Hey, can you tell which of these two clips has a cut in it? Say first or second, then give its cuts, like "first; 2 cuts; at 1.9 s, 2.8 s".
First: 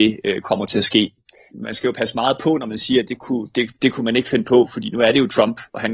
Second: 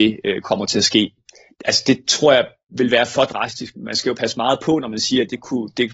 first; 2 cuts; at 1.5 s, 3.7 s